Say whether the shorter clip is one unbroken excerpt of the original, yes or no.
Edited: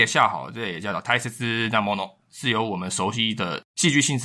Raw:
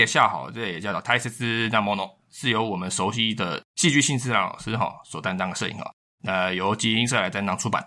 yes